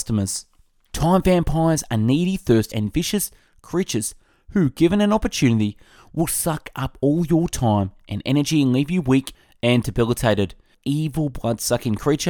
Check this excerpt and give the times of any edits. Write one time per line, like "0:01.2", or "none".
0:00.9
0:02.7
0:10.7